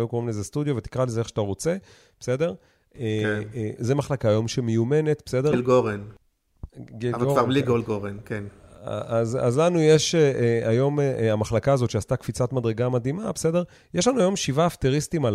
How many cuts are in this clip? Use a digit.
2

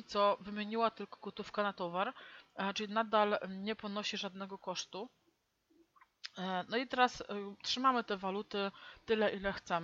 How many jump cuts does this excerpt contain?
0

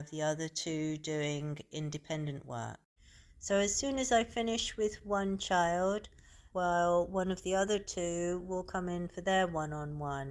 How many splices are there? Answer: 1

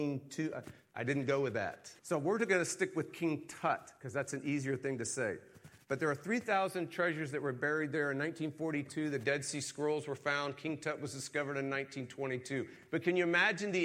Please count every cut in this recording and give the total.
1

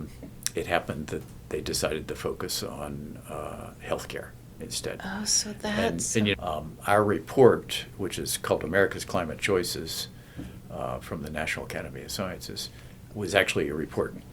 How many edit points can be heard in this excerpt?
2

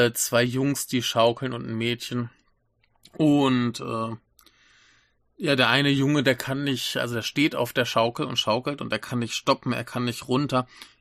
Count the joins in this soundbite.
0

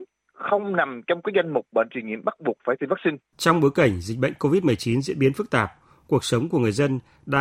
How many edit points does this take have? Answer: 1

